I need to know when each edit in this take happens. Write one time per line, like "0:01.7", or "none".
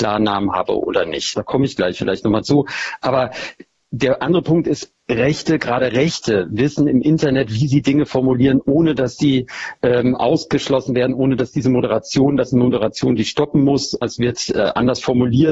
0:01.3
0:14.0